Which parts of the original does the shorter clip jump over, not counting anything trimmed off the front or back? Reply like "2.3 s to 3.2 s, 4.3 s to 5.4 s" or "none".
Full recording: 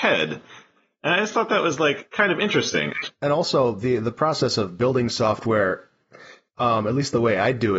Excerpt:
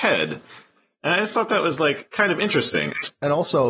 none